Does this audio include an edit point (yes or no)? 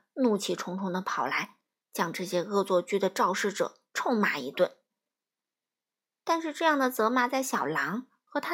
no